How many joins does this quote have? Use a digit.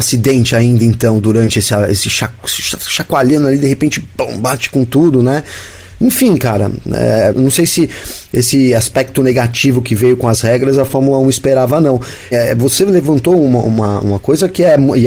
2